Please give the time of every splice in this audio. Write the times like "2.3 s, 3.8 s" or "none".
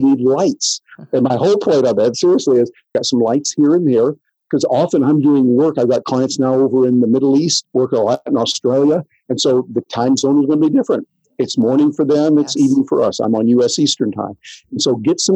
7.6 s